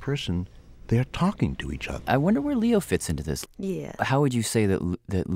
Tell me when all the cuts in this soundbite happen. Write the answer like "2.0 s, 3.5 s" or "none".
2.0 s, 3.4 s